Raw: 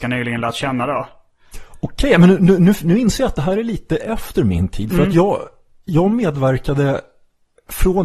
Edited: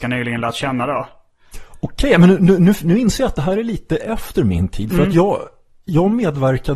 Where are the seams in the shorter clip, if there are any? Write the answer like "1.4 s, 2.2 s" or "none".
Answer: none